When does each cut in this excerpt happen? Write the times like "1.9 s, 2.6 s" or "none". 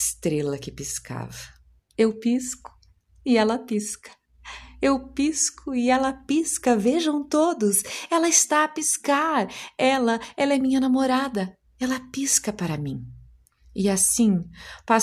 1.8 s